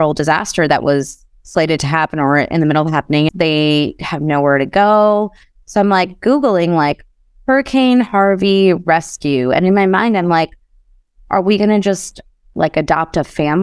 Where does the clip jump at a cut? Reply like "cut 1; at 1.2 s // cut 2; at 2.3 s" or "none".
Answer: cut 1; at 3.3 s